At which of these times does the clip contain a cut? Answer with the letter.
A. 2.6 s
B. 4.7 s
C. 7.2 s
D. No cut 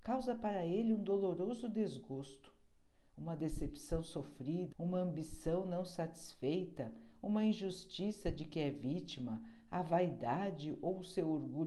B